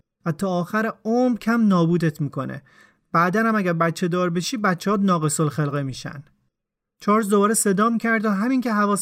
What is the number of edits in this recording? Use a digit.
1